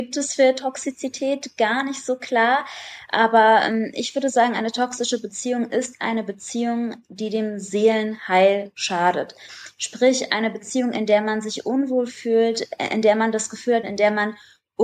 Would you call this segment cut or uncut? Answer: cut